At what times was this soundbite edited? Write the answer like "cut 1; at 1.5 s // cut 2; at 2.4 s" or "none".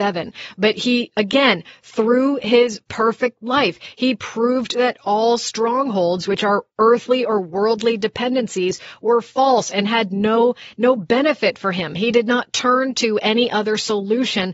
none